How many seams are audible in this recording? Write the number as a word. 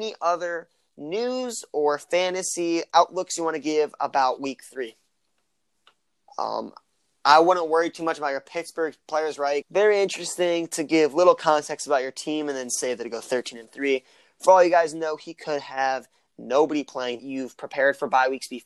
three